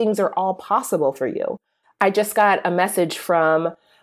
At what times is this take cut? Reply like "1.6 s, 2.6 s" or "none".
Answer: 1.8 s